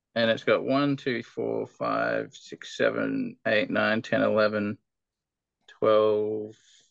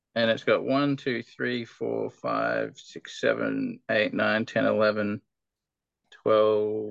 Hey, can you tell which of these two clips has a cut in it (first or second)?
first